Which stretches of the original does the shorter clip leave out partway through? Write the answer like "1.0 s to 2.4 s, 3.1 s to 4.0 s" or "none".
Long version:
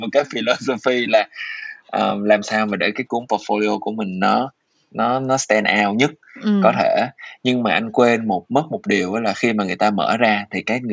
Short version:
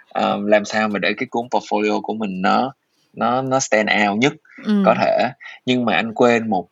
none